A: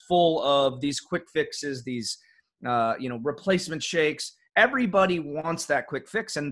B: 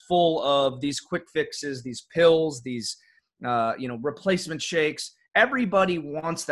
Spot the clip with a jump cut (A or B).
A